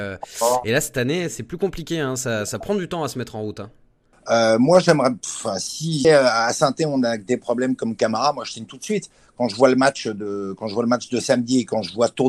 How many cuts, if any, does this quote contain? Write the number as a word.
two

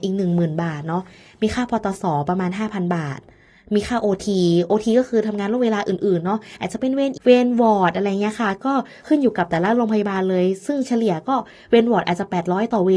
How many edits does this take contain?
one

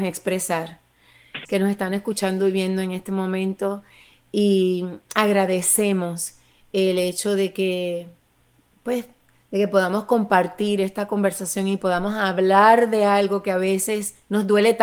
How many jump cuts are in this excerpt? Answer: one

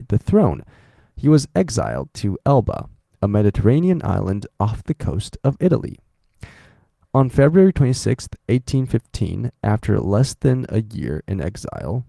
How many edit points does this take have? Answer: zero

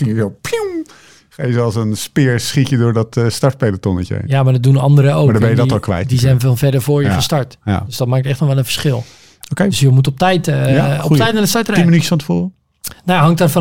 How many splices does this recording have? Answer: zero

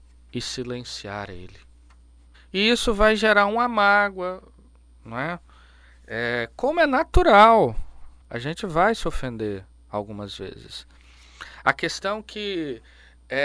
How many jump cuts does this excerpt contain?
two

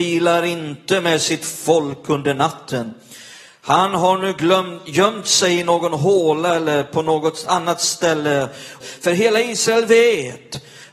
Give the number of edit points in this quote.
one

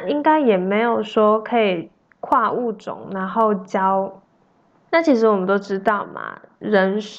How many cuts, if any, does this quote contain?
one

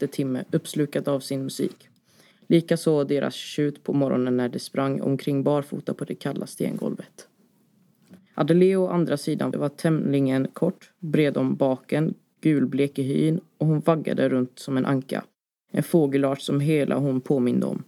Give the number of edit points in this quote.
three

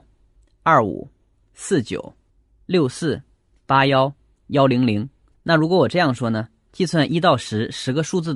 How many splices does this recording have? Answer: two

